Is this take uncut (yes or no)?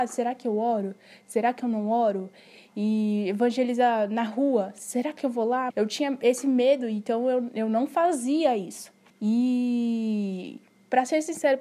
no